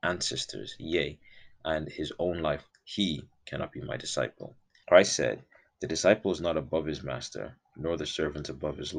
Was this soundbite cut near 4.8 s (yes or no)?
yes